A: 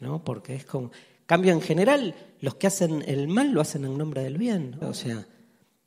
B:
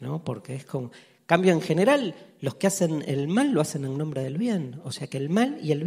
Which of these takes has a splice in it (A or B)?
A